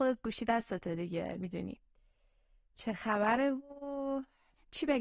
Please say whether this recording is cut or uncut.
uncut